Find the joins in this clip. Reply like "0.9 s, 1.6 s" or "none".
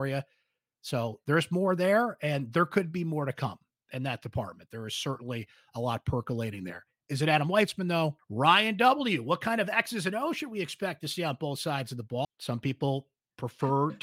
8.2 s, 12.2 s